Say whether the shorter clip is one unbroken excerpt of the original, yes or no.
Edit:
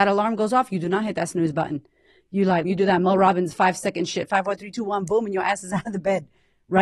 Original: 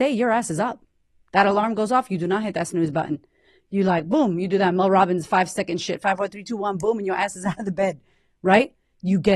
no